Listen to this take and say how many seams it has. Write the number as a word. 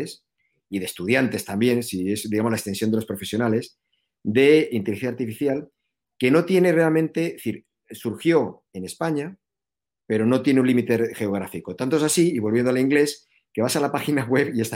zero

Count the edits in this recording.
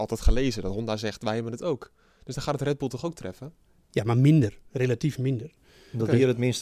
zero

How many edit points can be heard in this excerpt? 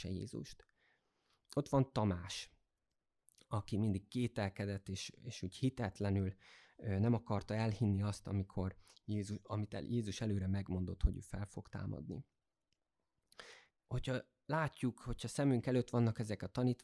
one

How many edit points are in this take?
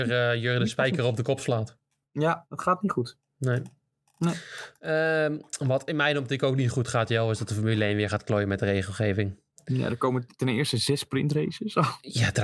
zero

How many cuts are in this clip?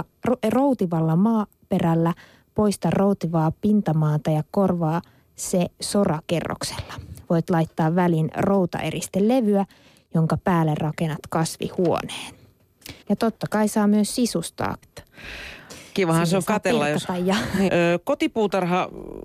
three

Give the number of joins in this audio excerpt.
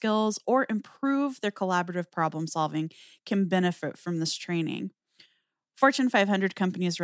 zero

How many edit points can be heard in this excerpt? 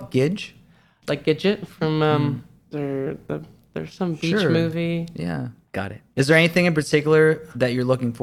three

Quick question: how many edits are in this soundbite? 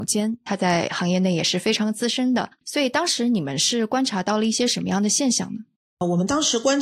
one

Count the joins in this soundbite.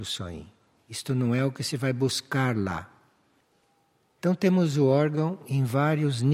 one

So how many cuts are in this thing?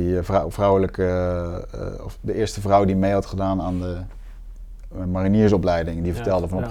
zero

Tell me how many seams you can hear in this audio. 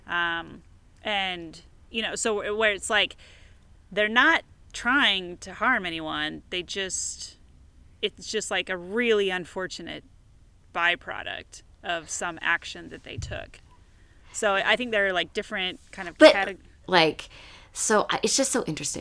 one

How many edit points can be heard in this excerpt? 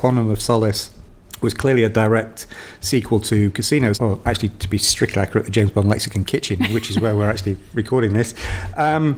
one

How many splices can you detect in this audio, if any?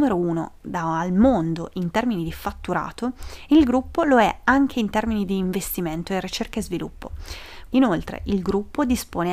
one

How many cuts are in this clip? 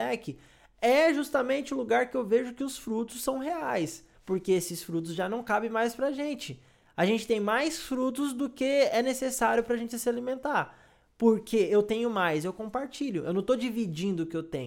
one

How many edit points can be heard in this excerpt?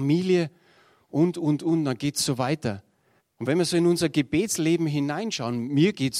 one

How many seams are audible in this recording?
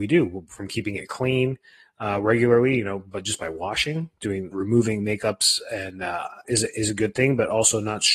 two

